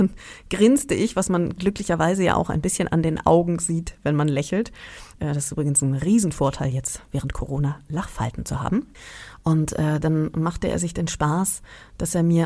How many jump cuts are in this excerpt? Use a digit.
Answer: 1